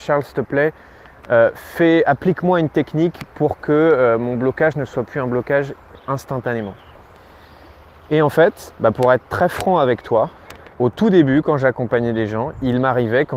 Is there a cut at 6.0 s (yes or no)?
yes